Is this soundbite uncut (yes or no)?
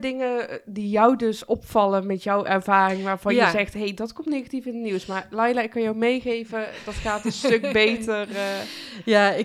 yes